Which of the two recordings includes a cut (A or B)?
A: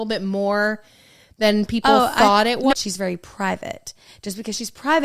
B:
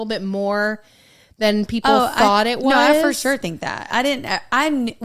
A